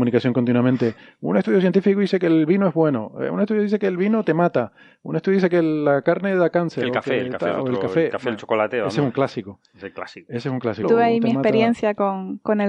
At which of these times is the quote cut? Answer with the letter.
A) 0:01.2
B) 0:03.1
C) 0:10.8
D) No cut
C